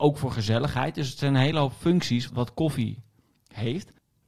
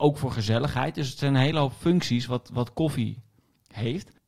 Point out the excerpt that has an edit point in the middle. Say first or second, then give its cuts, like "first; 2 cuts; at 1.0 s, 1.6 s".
first; 1 cut; at 2.3 s